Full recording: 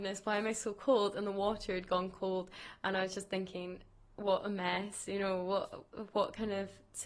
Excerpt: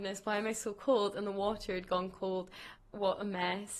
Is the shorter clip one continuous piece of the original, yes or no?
no